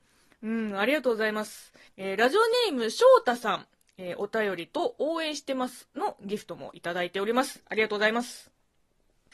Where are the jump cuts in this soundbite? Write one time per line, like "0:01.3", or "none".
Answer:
0:01.9

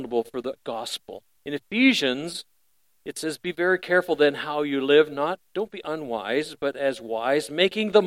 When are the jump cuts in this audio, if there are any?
0:01.4

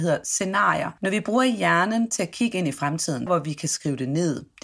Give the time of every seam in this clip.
0:01.0
0:03.3

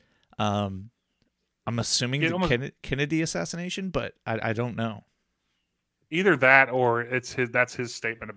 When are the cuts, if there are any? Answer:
none

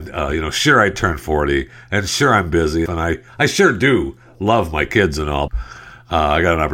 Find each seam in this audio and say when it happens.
0:02.9
0:05.5

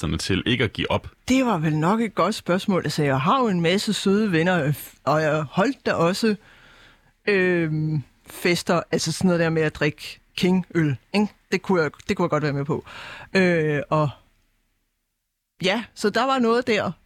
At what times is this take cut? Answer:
0:01.2

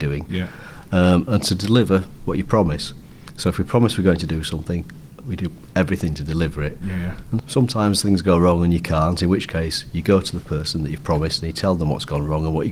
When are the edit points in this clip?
0:07.4

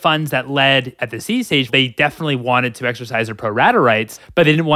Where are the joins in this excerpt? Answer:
0:01.7

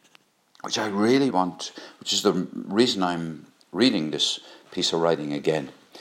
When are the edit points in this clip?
0:01.3

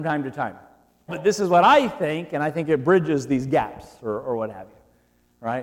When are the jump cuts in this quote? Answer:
0:01.1

